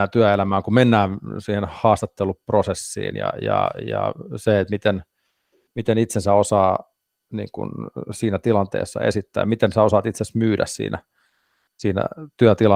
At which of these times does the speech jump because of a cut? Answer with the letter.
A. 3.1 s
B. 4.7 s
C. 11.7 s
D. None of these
D